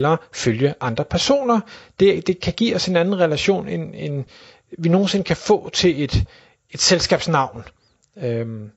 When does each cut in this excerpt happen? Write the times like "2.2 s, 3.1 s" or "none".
none